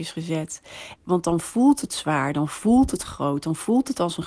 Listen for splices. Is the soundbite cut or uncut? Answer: cut